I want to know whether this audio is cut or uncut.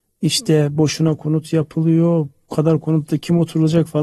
uncut